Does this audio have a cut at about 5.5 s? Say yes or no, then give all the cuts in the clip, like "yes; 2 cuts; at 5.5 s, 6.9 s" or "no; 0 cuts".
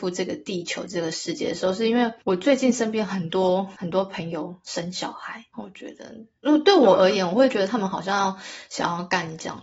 yes; 1 cut; at 5.5 s